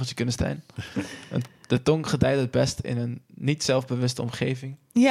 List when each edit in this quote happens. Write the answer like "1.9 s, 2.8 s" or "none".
none

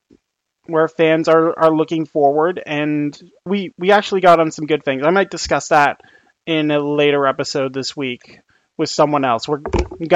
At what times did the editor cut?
3.5 s

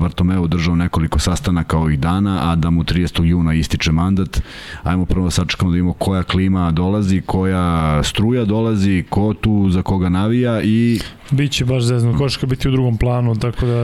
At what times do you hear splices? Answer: 12.1 s

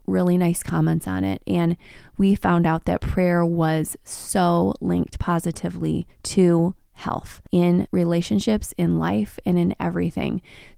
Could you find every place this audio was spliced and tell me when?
none

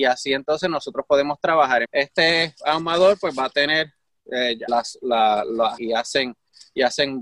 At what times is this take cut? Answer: 1.8 s, 4.7 s, 5.8 s

